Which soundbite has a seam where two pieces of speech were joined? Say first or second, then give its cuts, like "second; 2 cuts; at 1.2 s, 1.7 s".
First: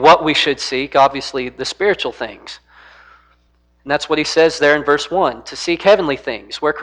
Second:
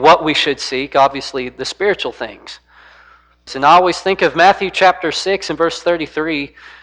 second; 1 cut; at 3.5 s